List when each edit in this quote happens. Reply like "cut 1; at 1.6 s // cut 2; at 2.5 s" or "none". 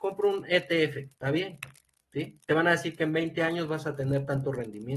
cut 1; at 1.2 s